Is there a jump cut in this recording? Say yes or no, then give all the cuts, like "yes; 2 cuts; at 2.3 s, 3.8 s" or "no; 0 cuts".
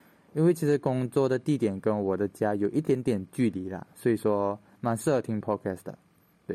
no; 0 cuts